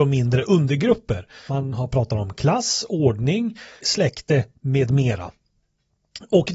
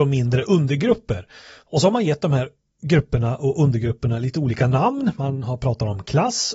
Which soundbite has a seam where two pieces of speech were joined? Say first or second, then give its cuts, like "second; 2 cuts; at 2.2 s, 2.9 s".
first; 2 cuts; at 1.5 s, 3.8 s